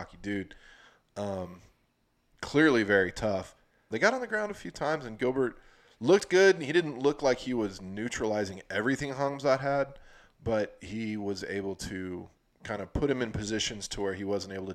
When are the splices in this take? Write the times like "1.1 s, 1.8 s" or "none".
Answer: 3.9 s